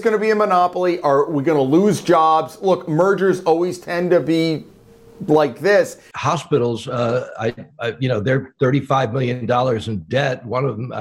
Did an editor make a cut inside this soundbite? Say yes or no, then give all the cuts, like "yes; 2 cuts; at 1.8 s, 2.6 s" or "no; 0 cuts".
yes; 1 cut; at 6.1 s